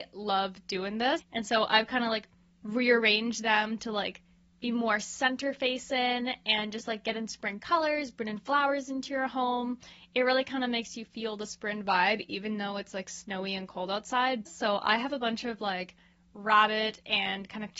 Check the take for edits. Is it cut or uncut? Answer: cut